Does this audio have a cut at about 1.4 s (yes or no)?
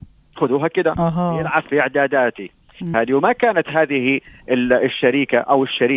no